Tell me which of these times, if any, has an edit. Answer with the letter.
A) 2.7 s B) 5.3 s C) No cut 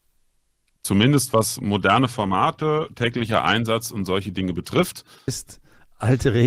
B